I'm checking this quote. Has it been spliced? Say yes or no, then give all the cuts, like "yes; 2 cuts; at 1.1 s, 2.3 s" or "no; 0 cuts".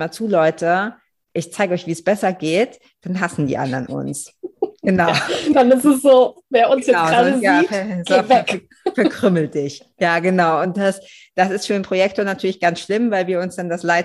no; 0 cuts